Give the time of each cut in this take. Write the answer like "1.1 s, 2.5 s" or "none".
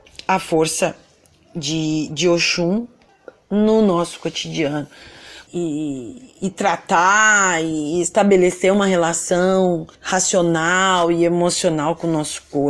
5.5 s, 9.9 s